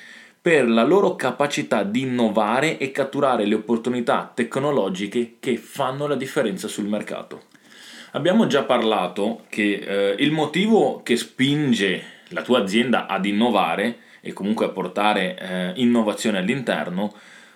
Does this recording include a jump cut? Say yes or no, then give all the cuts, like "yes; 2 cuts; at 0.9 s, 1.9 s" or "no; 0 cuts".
no; 0 cuts